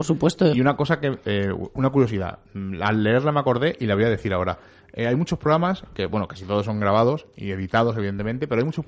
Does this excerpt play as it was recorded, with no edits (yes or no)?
yes